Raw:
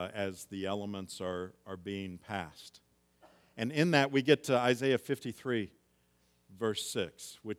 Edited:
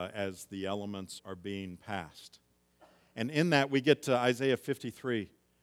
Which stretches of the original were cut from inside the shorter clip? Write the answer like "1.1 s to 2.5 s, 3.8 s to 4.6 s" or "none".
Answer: 1.2 s to 1.6 s